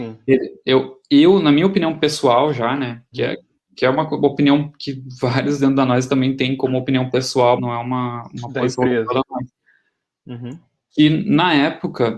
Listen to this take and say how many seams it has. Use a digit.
2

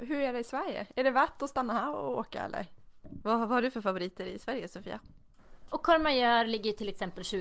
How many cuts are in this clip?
2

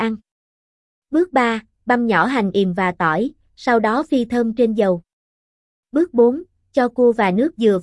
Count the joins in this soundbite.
0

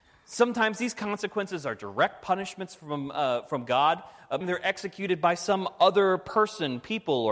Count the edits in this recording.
1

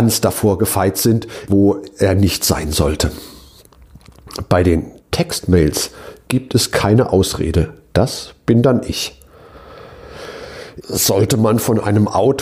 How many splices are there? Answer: 2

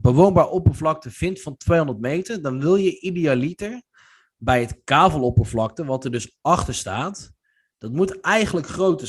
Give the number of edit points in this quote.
0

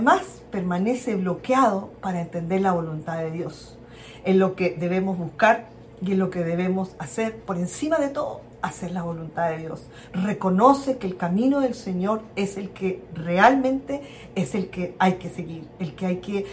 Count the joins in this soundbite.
1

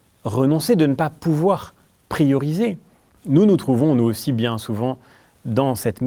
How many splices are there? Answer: 1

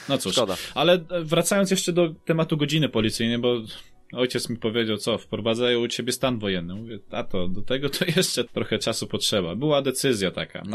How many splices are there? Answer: 1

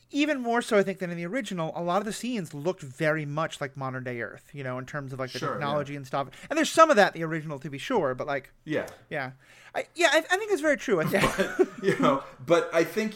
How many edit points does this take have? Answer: 1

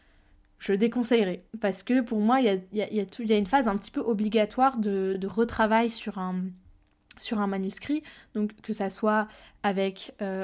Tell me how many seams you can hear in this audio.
0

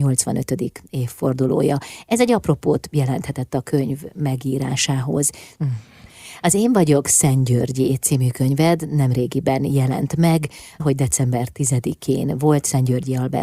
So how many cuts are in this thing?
2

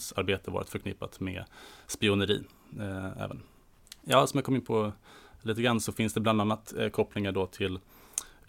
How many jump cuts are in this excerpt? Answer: 1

